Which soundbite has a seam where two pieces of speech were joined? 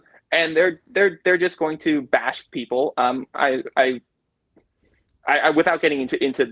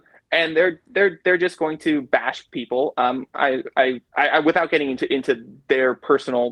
second; 1 cut; at 4.1 s

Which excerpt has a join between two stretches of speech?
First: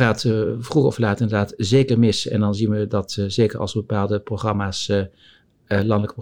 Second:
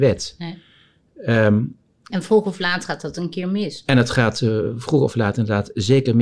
second; 1 cut; at 2.1 s

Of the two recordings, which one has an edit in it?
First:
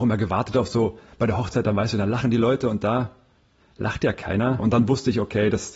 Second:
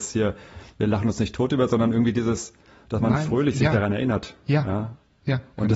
first; 1 cut; at 4.6 s

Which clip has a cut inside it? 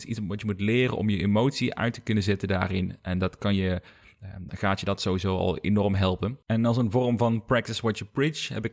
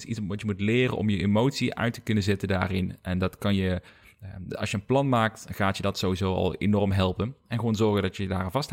first; 2 cuts; at 4.5 s, 6.4 s

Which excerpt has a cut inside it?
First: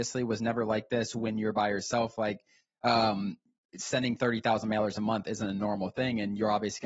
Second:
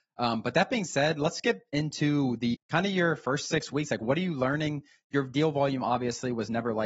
second; 1 cut; at 2.5 s

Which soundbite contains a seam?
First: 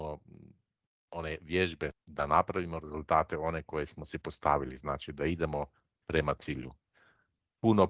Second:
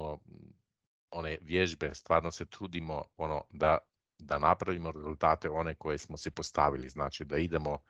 first; 1 cut; at 1.9 s

